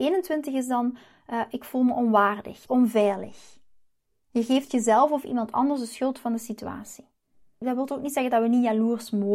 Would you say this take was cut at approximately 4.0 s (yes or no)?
no